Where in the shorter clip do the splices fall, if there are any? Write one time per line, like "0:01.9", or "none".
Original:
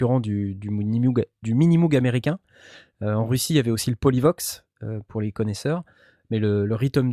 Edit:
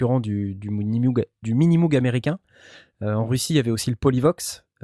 none